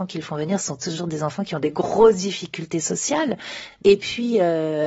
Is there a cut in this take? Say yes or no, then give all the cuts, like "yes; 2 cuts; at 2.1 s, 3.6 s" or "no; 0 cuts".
no; 0 cuts